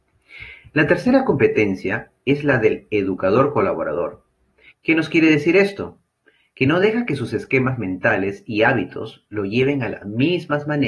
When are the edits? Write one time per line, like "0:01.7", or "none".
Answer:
0:04.7

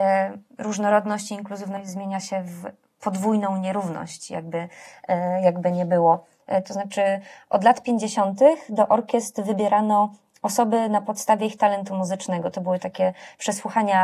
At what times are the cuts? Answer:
0:06.6

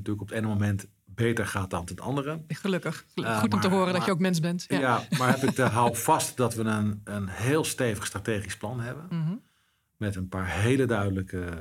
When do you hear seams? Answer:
none

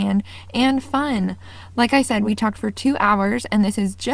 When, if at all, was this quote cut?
none

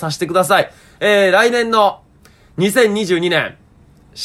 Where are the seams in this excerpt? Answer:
none

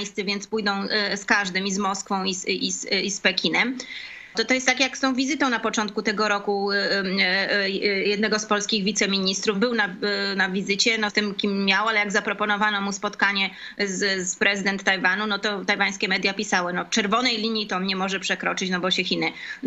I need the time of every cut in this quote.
0:04.3
0:09.5
0:11.1

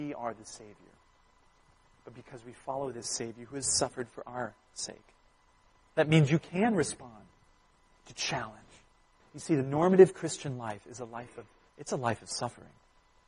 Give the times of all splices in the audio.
0:05.7
0:09.2
0:11.7

